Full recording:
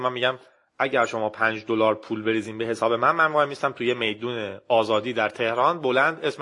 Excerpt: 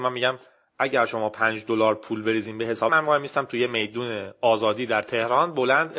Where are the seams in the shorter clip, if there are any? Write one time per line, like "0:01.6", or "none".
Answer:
0:02.9